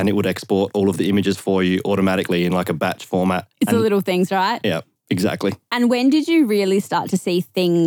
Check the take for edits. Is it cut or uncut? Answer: uncut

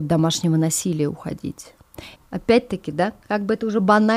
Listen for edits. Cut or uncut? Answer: cut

